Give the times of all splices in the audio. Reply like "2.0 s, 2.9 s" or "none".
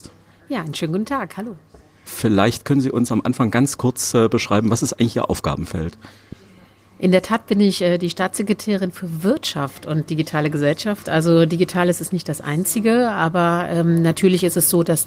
2.1 s